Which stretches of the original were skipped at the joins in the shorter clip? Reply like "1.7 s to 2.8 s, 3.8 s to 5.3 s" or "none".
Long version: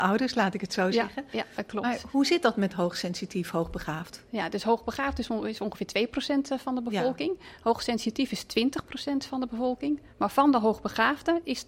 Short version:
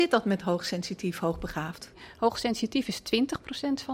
4.3 s to 7.4 s